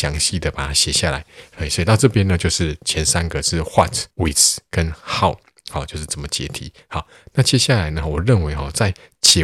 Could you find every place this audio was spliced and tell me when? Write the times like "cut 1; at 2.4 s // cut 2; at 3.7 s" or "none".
cut 1; at 4.1 s